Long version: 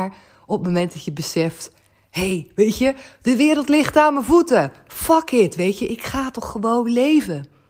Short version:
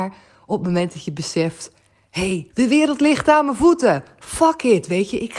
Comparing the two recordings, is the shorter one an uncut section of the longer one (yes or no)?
no